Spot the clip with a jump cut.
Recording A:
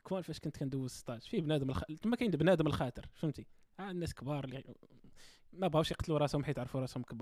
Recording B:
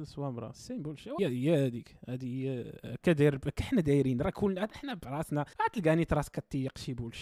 B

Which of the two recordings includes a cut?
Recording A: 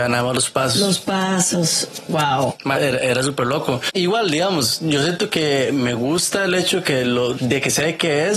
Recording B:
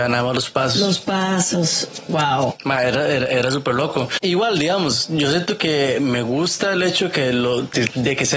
A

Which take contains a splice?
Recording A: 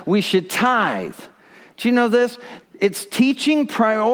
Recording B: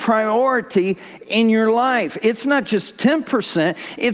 A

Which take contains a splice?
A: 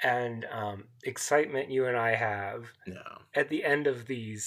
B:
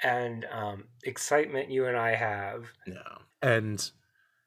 B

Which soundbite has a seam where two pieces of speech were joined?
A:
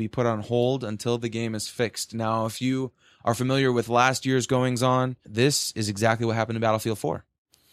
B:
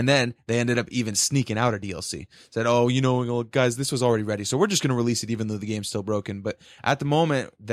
A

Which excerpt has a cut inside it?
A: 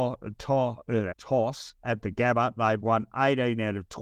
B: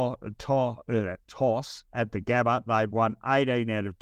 A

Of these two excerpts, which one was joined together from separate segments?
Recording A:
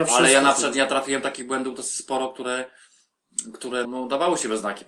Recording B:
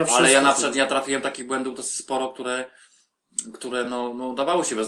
A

